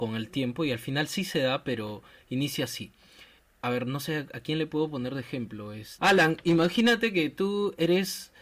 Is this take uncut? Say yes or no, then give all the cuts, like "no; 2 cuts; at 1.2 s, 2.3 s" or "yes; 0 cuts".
yes; 0 cuts